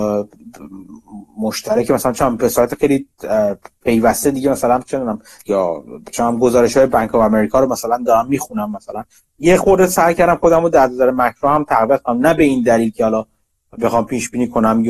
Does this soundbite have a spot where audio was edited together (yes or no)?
yes